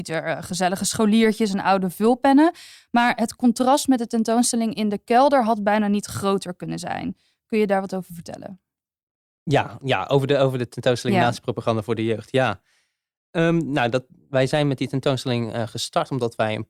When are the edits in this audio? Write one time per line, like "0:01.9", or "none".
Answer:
none